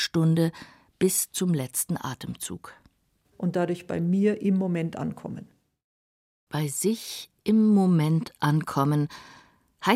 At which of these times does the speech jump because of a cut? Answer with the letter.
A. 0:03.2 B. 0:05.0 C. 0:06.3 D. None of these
A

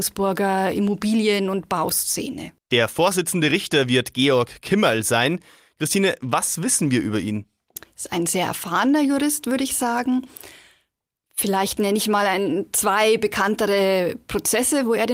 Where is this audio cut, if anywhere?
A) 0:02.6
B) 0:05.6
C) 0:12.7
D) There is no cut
D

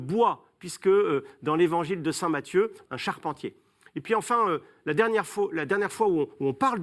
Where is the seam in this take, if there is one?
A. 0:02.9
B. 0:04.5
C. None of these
A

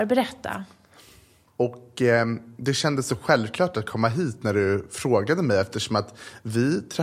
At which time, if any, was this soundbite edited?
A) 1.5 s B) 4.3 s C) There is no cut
A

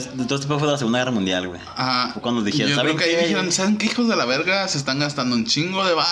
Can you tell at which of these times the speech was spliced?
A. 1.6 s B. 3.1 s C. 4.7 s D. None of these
D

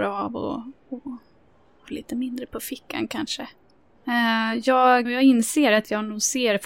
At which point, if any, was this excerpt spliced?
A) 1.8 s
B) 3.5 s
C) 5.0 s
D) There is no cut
C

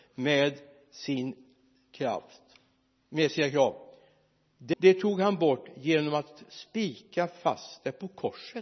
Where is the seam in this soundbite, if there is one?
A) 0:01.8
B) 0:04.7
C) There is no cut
B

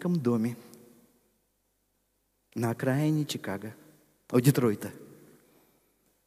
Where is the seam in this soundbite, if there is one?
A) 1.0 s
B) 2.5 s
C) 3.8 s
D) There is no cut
D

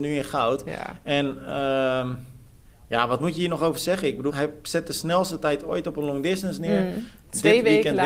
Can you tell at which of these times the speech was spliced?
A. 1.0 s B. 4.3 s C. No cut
B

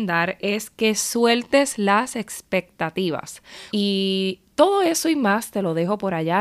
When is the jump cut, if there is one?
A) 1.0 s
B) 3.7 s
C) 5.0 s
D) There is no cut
B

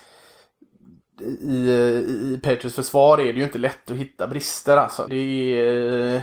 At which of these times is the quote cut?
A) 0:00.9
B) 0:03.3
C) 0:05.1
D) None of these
C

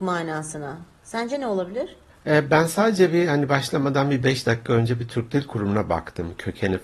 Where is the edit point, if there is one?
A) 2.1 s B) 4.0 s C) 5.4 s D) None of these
A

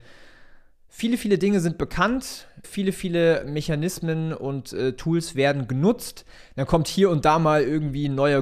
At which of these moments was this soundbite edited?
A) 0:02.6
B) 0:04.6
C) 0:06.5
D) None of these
A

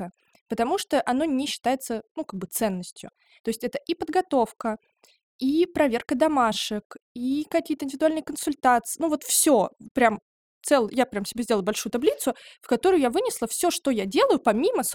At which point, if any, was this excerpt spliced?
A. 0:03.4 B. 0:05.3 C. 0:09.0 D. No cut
A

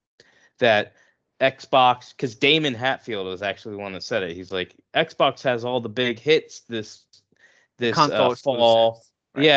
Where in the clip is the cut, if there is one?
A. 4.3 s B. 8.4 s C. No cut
C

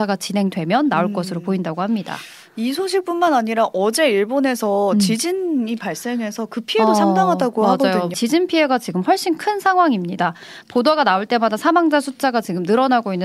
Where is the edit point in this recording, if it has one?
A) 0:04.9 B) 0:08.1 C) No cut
B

